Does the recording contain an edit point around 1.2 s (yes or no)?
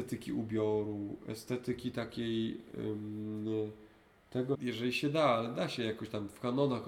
no